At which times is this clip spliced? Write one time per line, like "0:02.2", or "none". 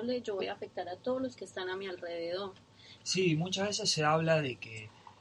0:03.0